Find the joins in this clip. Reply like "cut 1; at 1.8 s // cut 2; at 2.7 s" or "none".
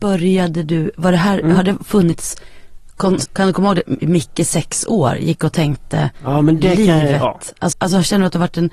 cut 1; at 3.3 s // cut 2; at 7.7 s